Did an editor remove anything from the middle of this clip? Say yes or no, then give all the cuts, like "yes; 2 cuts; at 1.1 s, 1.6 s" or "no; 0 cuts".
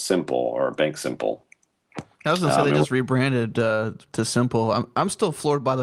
no; 0 cuts